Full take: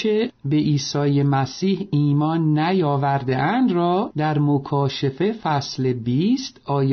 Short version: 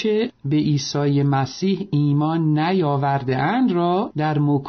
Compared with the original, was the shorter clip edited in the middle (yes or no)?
no